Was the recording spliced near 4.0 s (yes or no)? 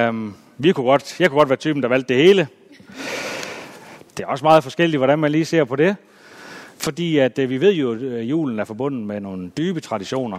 yes